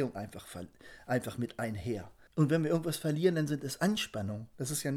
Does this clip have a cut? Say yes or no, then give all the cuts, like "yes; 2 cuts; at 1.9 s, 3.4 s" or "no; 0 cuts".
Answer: yes; 1 cut; at 2.3 s